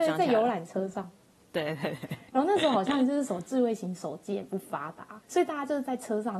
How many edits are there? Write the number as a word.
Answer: one